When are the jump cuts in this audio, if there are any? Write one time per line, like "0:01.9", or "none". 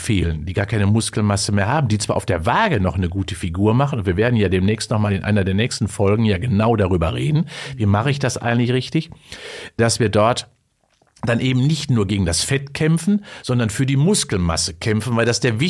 none